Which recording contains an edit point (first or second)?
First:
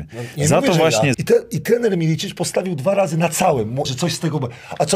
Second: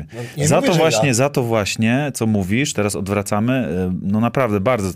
first